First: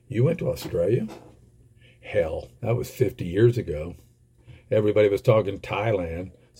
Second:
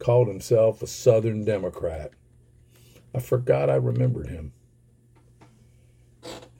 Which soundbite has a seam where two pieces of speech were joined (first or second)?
first